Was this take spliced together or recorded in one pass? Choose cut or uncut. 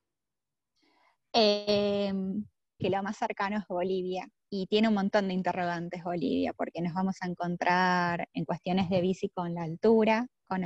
cut